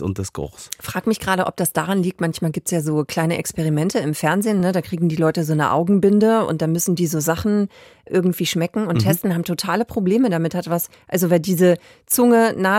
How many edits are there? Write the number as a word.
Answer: zero